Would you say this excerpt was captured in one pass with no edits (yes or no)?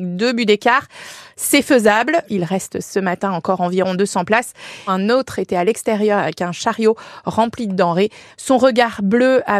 no